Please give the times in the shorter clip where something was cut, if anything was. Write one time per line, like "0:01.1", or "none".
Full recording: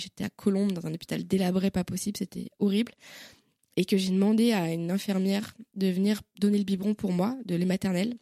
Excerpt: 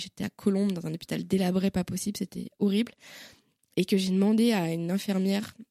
none